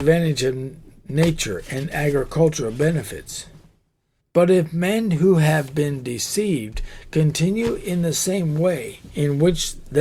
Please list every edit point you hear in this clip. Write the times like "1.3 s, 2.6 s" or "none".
4.2 s